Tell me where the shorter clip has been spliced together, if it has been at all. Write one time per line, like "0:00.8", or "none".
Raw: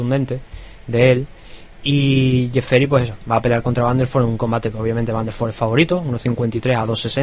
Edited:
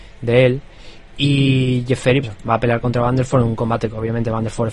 0:02.2